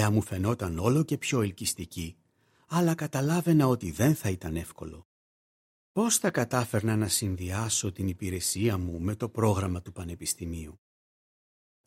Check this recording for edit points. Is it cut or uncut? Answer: uncut